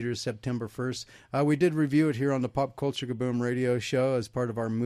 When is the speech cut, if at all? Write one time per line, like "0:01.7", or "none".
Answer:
none